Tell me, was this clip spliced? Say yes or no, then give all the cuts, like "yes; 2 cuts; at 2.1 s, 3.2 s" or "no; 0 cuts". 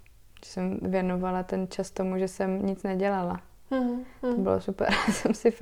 no; 0 cuts